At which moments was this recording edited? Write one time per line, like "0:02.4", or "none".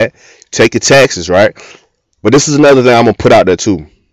none